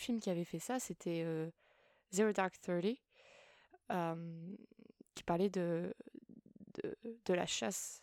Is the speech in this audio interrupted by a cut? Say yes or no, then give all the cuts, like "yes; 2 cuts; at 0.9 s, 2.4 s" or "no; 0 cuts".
no; 0 cuts